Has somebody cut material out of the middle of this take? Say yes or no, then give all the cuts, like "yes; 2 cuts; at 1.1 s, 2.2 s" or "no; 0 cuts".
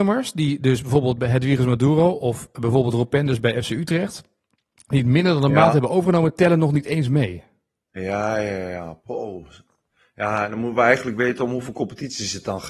no; 0 cuts